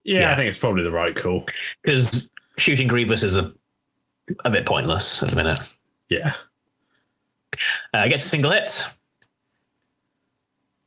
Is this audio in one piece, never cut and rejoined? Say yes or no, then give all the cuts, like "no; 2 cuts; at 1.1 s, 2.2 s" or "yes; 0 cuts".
yes; 0 cuts